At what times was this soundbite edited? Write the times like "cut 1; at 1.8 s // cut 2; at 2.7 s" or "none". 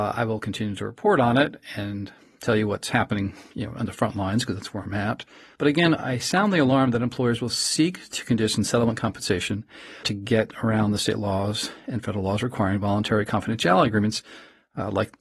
cut 1; at 5.6 s // cut 2; at 10.0 s